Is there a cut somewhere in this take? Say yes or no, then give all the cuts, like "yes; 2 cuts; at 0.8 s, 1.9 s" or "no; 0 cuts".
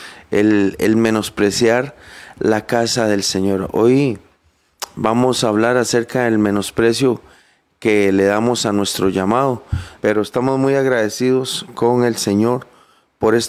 yes; 1 cut; at 10.0 s